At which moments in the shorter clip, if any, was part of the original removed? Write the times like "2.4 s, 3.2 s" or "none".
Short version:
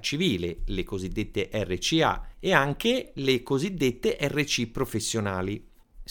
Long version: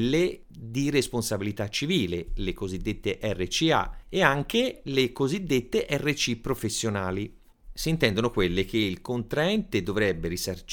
none